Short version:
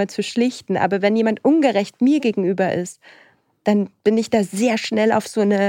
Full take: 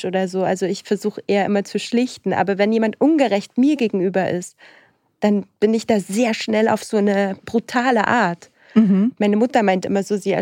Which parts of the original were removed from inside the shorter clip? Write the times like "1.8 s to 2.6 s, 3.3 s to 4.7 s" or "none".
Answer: none